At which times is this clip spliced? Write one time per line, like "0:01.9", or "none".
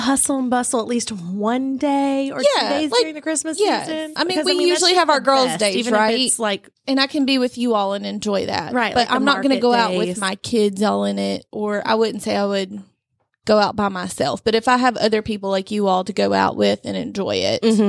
0:04.2